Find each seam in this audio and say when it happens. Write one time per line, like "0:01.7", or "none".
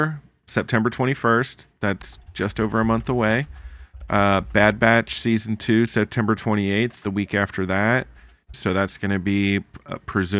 0:08.5